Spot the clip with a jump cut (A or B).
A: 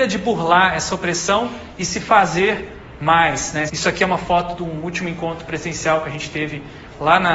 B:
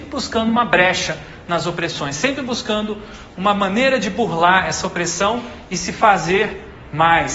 A